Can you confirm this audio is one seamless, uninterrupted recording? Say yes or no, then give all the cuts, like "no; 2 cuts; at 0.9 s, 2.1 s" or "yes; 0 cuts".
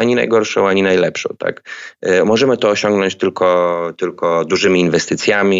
yes; 0 cuts